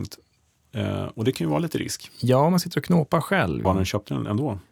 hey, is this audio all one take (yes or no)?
no